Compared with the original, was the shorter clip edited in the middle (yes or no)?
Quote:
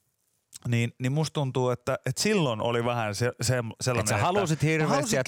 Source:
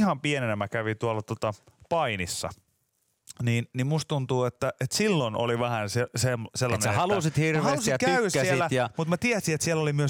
no